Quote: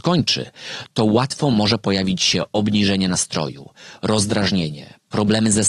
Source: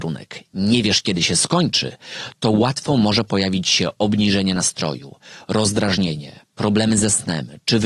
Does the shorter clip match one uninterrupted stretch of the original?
yes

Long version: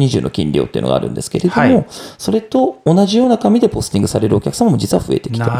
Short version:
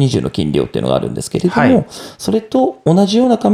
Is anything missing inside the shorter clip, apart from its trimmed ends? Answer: no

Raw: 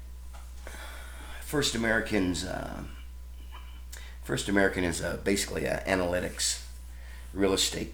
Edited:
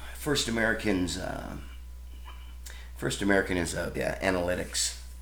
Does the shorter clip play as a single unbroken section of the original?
no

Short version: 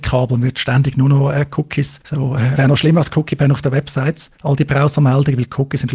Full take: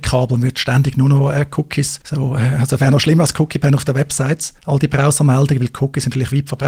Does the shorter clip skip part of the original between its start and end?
yes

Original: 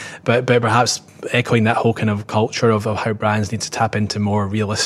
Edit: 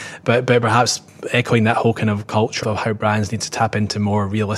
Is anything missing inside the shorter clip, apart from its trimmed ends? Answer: yes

